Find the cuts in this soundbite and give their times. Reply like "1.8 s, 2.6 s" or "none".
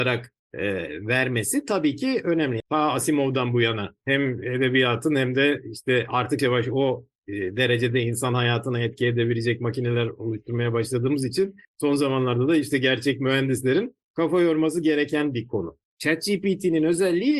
2.6 s, 6.4 s